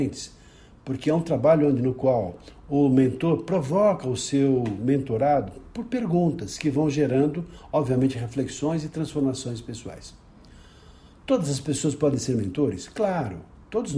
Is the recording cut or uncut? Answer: uncut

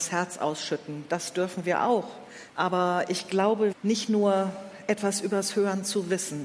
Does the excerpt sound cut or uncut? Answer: cut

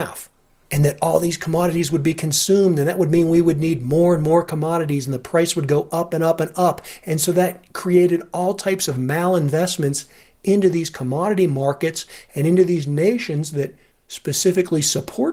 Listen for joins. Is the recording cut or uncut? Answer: uncut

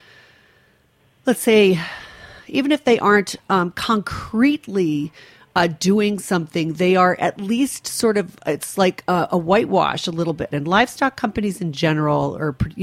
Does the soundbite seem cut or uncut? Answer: cut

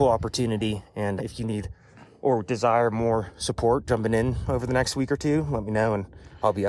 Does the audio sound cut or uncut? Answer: cut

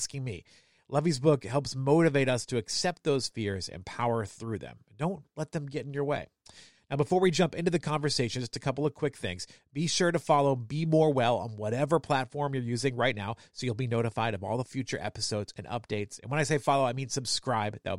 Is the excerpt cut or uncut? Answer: uncut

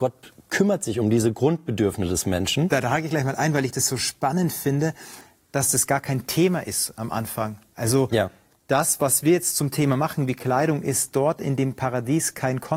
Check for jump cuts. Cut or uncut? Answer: uncut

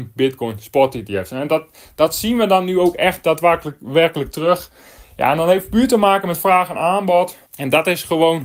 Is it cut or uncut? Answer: cut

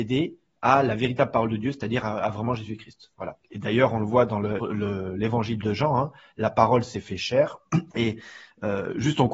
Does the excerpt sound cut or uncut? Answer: cut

